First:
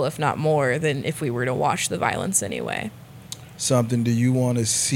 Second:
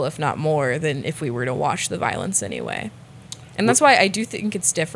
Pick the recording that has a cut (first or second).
first